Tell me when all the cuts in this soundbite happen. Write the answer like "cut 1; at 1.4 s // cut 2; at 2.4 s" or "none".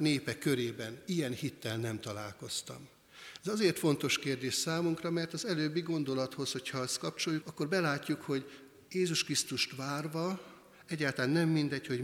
cut 1; at 7.4 s